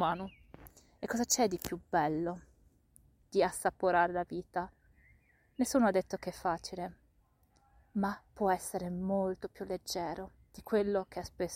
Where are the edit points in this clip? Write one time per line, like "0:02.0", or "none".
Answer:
none